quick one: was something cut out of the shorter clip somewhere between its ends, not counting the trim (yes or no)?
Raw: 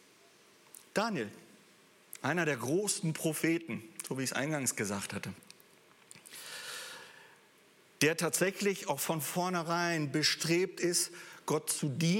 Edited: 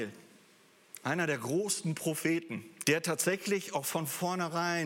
yes